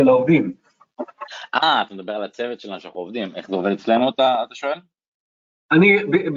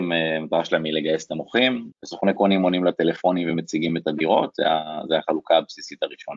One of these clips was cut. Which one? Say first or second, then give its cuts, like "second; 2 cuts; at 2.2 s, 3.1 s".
second; 1 cut; at 1.9 s